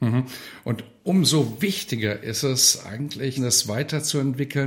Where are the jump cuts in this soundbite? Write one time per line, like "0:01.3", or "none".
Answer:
0:03.4